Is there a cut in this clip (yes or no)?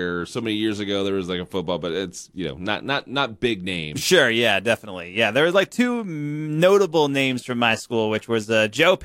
no